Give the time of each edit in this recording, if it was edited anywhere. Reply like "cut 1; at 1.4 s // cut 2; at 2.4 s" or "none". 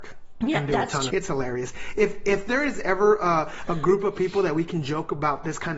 cut 1; at 1.1 s